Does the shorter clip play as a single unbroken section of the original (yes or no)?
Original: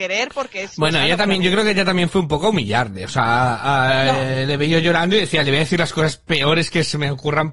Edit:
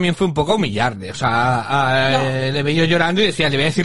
yes